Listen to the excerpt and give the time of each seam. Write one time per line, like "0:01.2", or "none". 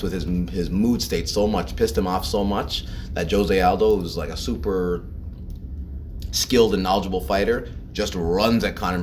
none

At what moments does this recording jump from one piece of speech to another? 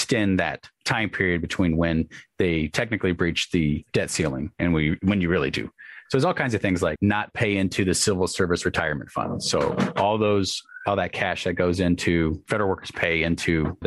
none

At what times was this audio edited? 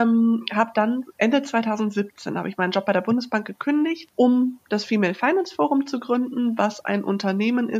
none

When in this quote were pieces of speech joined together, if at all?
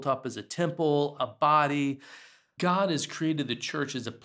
0:01.2
0:02.6

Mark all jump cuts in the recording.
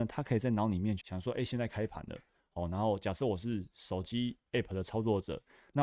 0:01.0

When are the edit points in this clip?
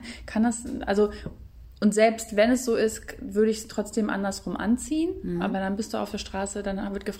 none

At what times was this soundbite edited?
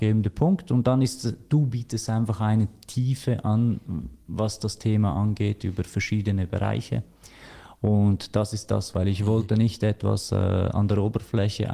0:08.9

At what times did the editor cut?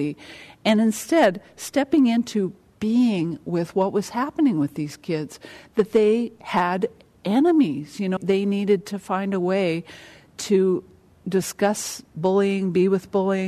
0:08.2

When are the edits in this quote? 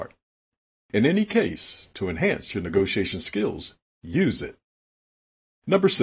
none

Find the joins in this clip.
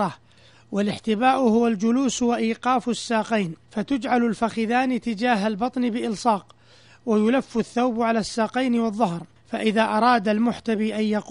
0:03.6

